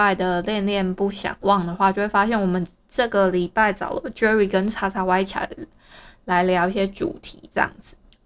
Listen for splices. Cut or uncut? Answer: uncut